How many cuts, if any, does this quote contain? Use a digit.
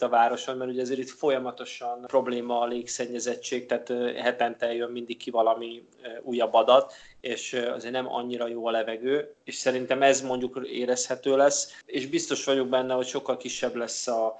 0